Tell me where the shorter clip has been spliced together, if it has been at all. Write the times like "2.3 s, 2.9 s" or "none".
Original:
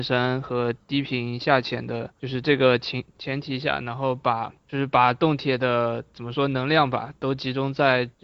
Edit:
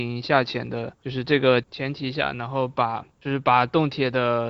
1.6 s